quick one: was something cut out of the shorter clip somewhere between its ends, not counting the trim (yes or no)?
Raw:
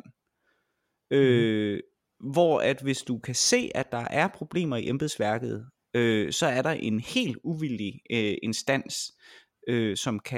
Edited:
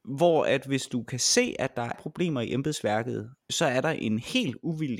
yes